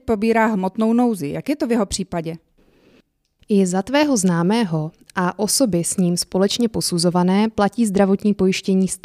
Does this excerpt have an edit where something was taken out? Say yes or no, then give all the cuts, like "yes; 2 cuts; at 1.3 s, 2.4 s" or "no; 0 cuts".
no; 0 cuts